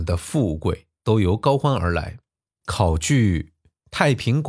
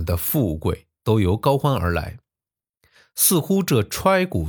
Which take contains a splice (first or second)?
first